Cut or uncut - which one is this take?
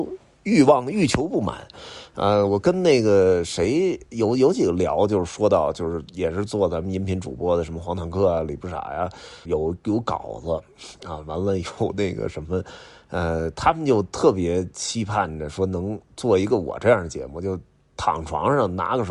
cut